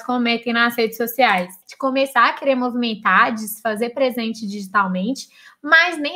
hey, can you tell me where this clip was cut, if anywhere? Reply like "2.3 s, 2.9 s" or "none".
1.6 s